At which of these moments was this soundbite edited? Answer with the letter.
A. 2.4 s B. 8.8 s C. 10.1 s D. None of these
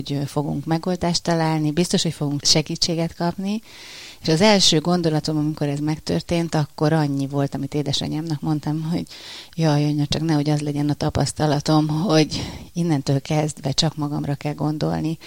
A